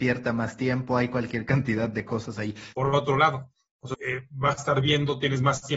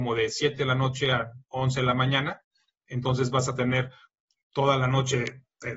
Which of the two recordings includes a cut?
first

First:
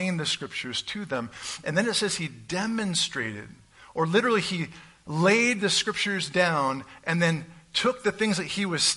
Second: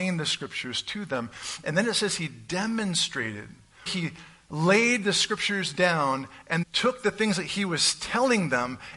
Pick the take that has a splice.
second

